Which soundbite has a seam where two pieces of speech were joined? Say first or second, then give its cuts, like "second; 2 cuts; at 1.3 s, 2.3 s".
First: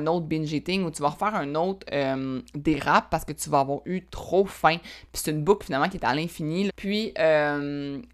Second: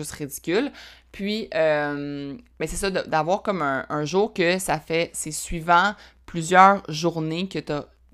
first; 1 cut; at 6.7 s